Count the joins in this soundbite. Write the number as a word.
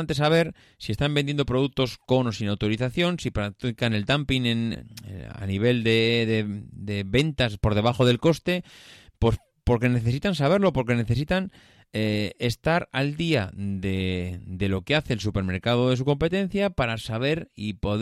one